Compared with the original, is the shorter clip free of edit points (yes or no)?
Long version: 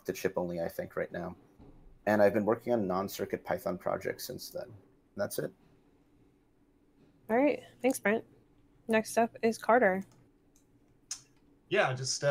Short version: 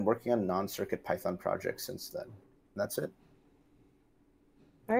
yes